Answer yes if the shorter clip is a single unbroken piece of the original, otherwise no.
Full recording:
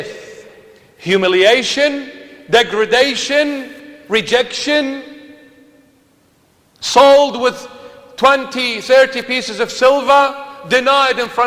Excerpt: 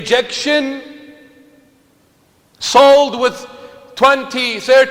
yes